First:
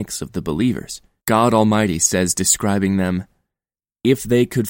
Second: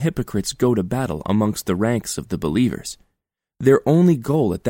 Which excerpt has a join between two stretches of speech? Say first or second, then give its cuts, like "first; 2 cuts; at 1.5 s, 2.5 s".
first; 1 cut; at 1.2 s